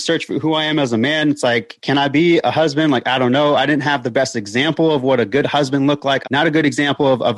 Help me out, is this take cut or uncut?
cut